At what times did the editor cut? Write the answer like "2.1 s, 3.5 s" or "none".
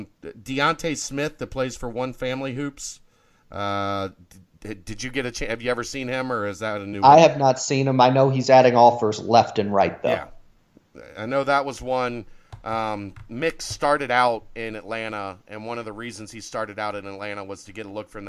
none